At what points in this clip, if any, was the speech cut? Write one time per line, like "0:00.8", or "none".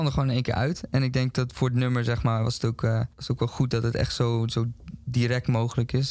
0:03.1